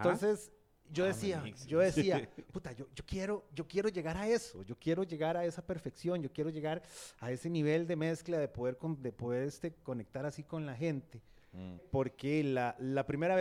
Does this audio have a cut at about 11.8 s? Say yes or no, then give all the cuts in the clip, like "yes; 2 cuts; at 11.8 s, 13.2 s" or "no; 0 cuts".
yes; 1 cut; at 11.8 s